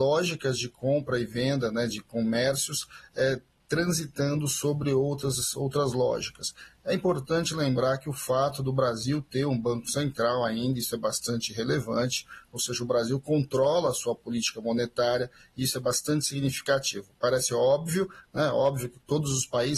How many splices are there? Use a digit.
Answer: 0